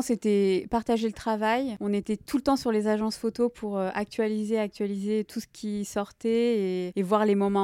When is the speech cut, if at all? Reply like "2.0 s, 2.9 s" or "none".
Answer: none